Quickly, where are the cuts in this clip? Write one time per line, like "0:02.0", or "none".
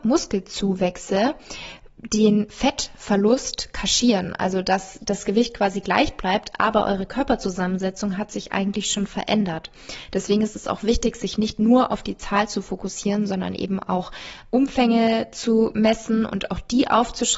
none